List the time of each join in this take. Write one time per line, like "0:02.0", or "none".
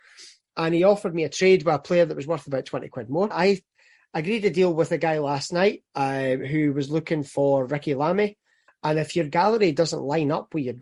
0:03.3
0:08.7